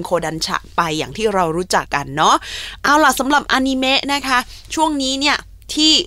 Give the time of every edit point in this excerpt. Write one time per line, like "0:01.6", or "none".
0:01.9